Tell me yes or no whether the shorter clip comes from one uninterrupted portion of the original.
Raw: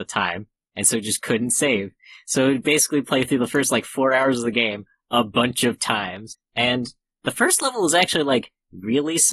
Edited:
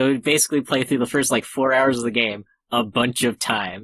yes